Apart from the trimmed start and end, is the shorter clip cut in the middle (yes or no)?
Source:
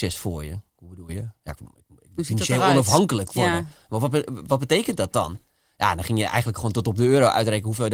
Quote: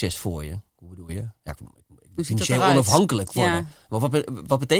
no